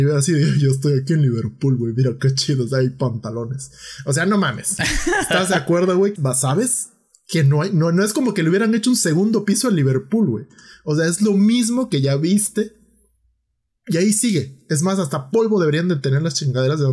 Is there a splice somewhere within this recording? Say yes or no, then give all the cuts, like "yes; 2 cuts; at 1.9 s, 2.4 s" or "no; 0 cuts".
yes; 1 cut; at 6.2 s